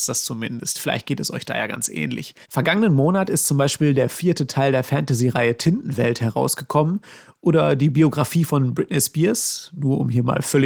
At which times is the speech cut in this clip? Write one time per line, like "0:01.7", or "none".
0:02.4